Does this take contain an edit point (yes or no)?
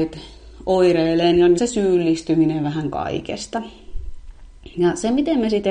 yes